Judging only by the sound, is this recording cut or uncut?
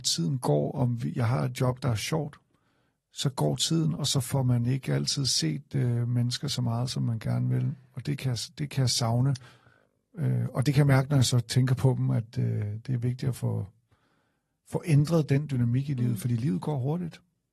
uncut